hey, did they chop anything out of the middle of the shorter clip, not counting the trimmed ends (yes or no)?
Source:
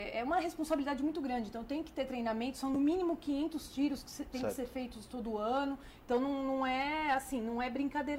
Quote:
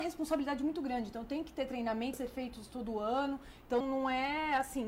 yes